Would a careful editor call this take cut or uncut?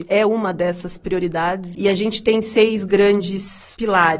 cut